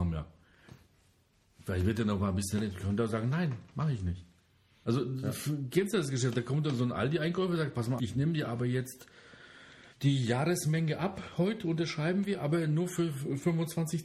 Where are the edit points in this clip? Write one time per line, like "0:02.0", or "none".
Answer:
0:04.8
0:08.0
0:09.9

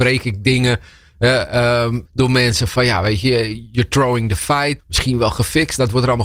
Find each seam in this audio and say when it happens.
0:02.1
0:04.8

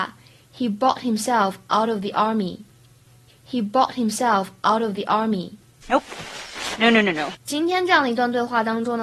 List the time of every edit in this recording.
0:05.8
0:07.4

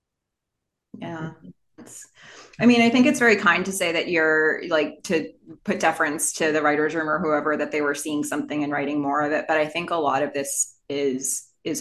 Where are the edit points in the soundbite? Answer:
0:01.8

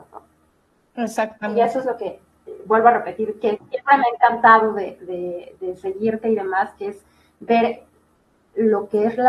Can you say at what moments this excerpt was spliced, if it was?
none

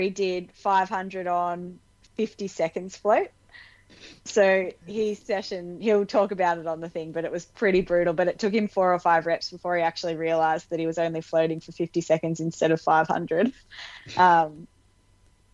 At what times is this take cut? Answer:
none

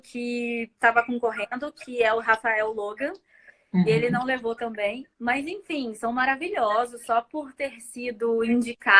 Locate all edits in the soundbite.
none

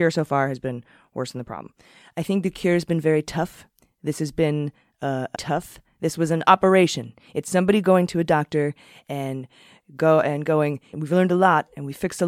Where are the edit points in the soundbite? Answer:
0:05.3
0:10.9

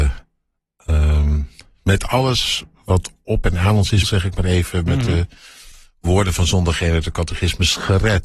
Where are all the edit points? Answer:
0:04.0

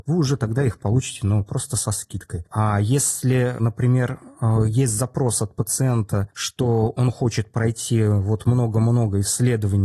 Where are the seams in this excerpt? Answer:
0:02.5

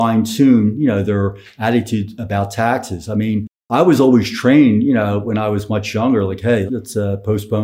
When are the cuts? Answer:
0:06.7

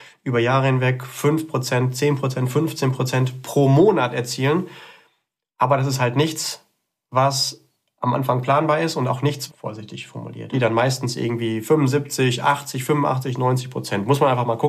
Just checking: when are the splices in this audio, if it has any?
0:09.5
0:10.5

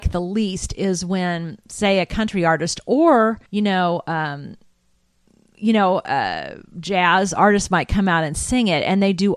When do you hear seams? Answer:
0:03.5

